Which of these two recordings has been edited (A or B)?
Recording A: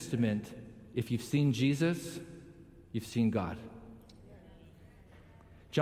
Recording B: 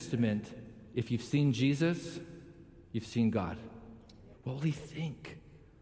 B